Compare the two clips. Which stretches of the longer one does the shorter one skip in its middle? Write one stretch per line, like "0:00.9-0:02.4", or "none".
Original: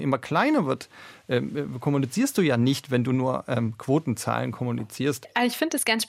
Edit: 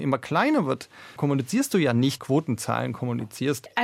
0:01.2-0:01.8
0:02.8-0:03.8